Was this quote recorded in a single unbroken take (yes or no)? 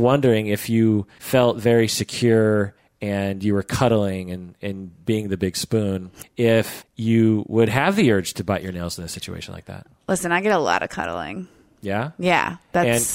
yes